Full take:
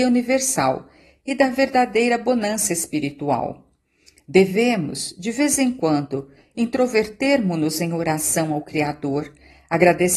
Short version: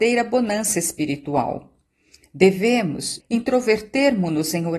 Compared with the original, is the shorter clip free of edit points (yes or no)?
no